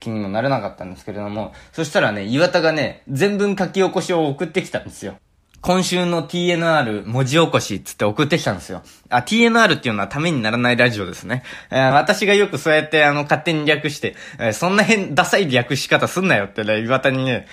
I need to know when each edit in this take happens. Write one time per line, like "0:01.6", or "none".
0:11.9